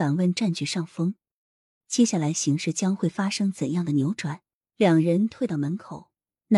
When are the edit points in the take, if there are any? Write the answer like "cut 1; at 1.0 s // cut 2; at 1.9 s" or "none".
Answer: cut 1; at 1.8 s // cut 2; at 4.6 s

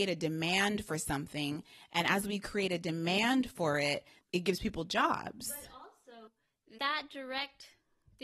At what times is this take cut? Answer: cut 1; at 4.2 s // cut 2; at 6.8 s

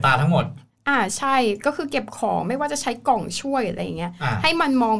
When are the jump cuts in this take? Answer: none

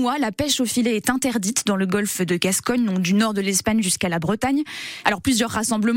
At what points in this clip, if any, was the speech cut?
cut 1; at 5.0 s

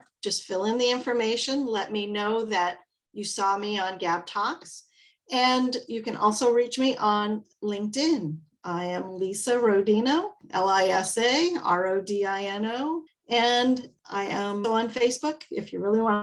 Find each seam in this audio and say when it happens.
cut 1; at 13.1 s // cut 2; at 14.6 s

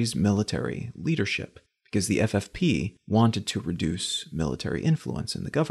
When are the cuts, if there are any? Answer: none

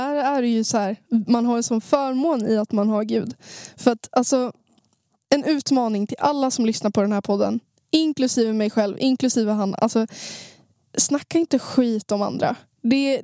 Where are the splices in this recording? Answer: none

